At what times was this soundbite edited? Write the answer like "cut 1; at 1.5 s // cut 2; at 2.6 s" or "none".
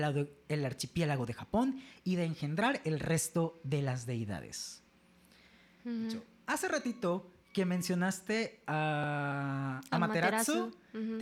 none